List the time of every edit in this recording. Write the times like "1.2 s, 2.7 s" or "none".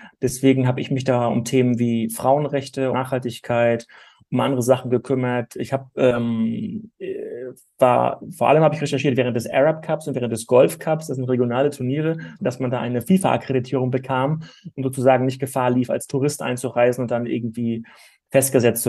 2.9 s, 12.4 s